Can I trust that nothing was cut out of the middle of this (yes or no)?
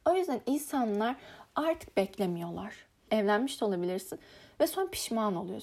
no